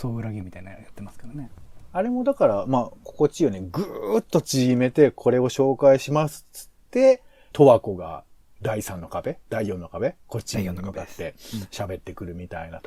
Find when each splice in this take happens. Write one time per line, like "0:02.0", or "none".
0:07.5
0:08.6